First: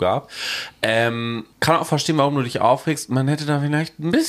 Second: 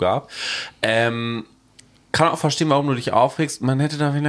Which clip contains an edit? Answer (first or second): first